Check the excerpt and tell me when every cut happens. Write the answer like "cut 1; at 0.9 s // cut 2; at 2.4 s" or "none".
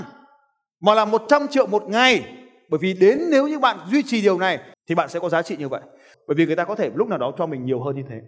cut 1; at 4.7 s // cut 2; at 6.1 s